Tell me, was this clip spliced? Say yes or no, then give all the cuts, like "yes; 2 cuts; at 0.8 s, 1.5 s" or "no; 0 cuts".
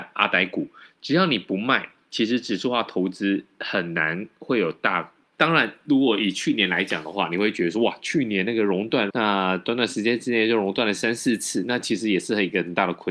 yes; 2 cuts; at 5.3 s, 9.1 s